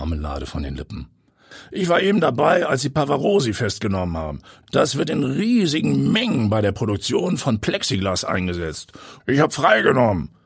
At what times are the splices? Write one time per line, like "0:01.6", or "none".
0:04.6
0:09.2

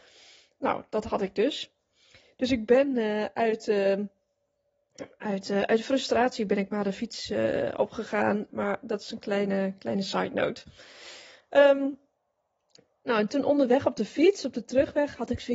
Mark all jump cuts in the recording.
0:08.5

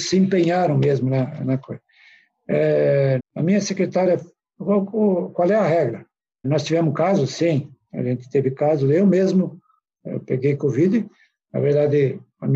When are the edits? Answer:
0:03.2
0:06.4

